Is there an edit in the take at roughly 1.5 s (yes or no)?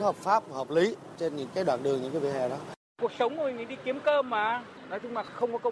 yes